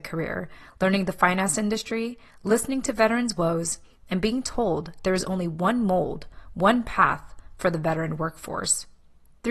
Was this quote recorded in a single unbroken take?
yes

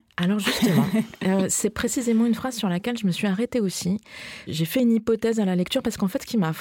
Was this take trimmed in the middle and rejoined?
no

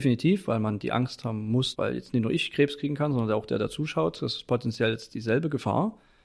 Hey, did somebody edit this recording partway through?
yes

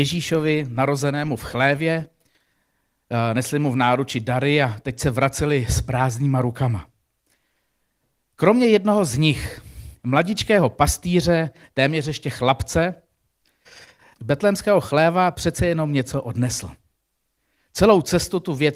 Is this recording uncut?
no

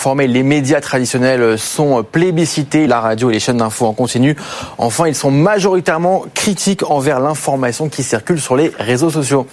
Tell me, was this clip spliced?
yes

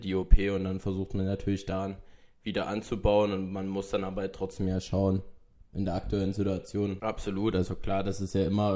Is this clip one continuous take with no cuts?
no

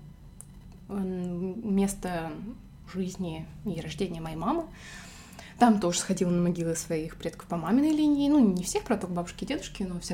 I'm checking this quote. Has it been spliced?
no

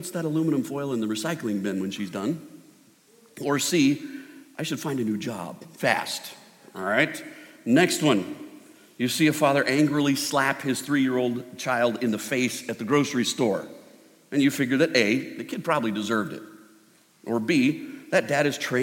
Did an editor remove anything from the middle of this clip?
no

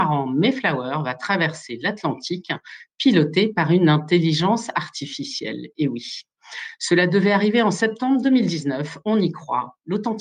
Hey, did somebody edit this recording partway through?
no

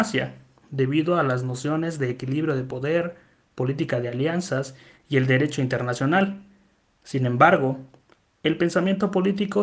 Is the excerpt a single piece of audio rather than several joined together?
yes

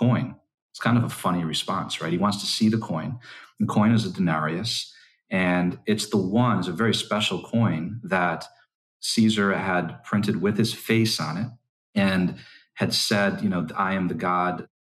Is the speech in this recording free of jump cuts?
yes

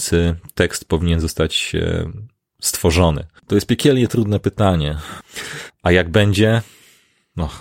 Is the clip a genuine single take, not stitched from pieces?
no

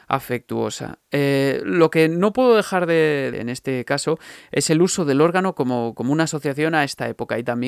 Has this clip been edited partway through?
yes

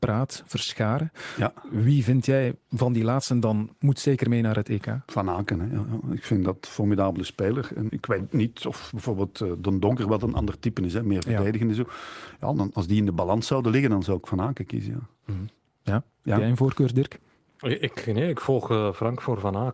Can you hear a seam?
yes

